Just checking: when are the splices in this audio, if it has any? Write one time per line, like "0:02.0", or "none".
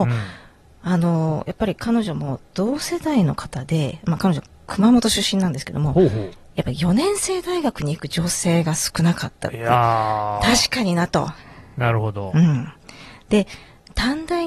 none